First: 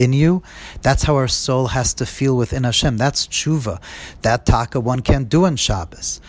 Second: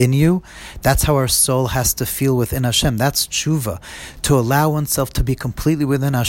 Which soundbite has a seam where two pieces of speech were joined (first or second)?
first